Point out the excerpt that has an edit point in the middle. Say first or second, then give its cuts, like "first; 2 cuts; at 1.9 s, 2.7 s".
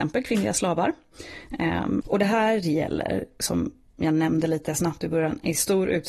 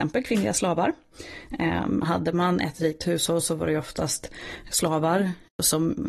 first; 1 cut; at 2.0 s